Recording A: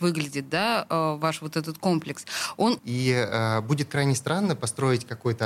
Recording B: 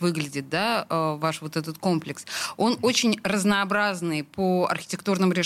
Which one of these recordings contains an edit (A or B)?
A